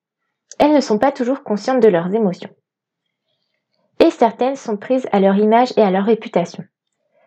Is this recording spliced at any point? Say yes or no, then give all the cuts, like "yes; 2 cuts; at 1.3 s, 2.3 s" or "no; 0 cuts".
no; 0 cuts